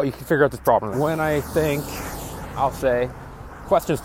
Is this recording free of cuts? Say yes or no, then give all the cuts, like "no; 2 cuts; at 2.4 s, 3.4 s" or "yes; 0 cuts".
no; 1 cut; at 0.9 s